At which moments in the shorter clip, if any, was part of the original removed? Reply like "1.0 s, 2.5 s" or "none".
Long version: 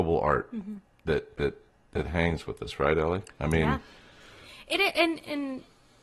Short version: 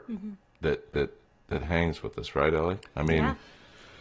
none